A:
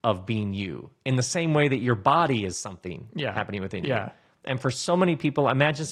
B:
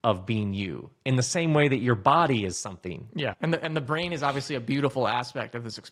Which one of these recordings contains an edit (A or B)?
B